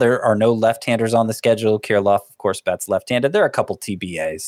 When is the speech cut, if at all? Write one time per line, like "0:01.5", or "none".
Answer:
none